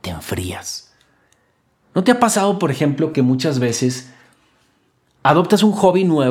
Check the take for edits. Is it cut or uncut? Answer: uncut